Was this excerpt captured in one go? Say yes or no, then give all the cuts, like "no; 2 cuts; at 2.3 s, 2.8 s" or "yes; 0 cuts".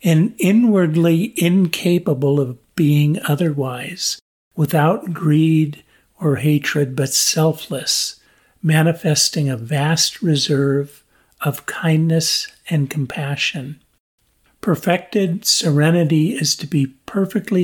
yes; 0 cuts